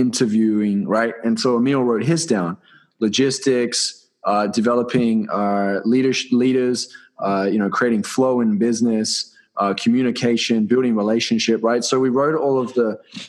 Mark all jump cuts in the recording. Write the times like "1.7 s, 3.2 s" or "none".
none